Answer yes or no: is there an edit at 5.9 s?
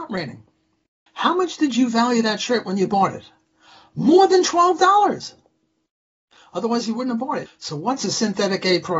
no